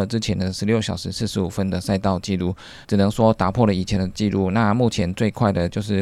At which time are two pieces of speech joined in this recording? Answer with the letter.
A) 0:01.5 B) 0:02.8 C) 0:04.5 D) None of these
B